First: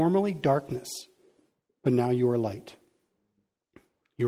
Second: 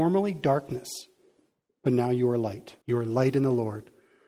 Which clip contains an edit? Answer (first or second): second